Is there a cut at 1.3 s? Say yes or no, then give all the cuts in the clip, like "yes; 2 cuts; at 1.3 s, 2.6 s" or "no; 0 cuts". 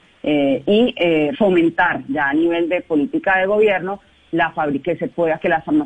yes; 1 cut; at 1.3 s